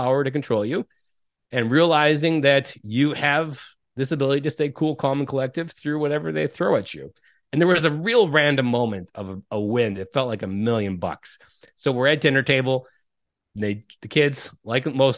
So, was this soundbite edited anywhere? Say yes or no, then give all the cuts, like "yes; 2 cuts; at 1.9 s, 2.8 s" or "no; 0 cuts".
no; 0 cuts